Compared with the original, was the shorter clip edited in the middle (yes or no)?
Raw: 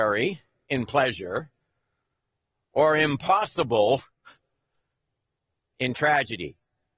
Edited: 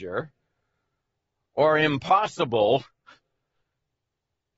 no